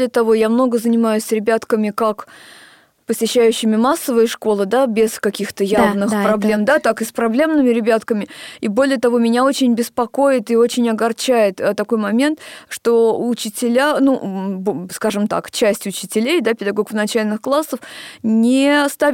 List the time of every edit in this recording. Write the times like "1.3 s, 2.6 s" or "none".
none